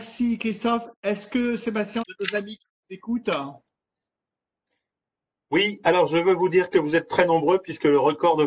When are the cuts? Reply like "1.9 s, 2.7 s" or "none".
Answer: 2.0 s